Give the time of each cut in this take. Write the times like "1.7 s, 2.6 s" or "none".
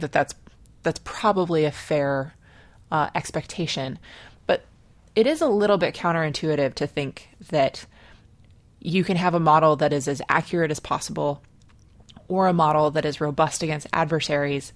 none

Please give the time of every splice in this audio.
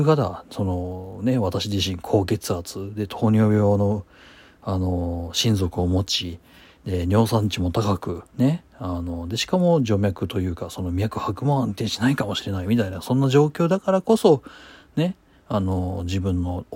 8.3 s

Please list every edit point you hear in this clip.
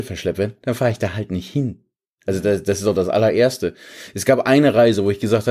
none

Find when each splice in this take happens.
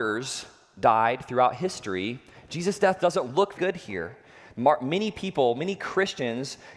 3.5 s

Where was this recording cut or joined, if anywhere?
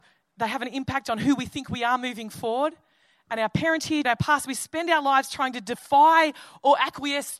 4.0 s

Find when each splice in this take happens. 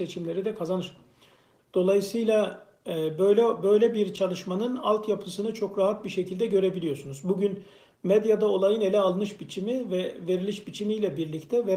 1.6 s

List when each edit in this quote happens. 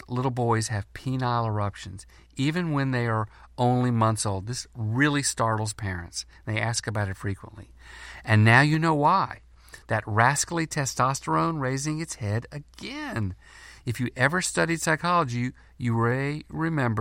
none

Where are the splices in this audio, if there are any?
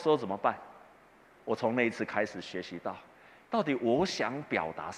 3.5 s

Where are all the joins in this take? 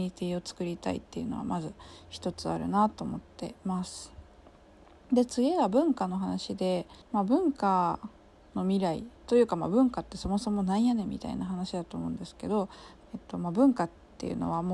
7.0 s, 9.2 s, 13.0 s

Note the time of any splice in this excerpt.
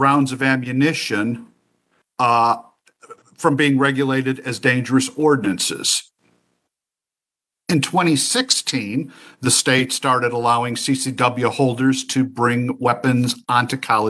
none

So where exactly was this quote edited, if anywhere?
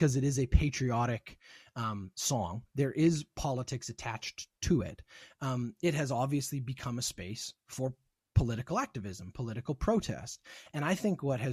none

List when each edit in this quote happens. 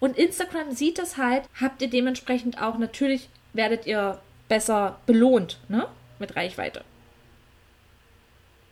1.5 s

